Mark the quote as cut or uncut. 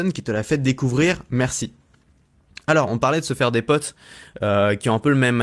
uncut